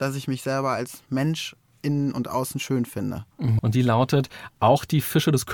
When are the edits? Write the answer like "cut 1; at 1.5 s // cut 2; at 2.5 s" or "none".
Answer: cut 1; at 3.6 s